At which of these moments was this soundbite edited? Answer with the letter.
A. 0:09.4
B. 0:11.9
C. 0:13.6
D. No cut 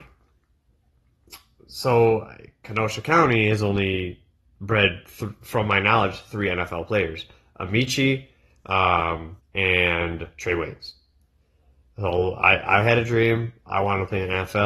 A